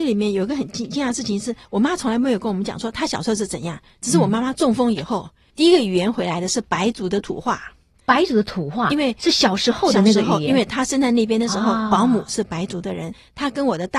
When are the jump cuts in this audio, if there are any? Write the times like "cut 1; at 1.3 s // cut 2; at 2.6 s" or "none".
none